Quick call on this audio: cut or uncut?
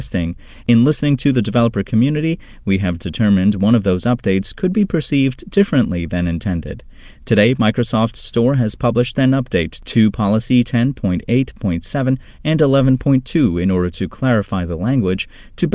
uncut